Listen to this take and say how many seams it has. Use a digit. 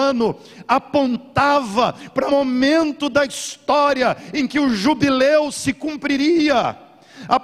1